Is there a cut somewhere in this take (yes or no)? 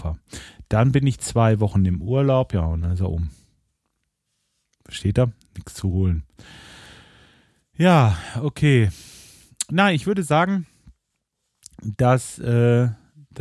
no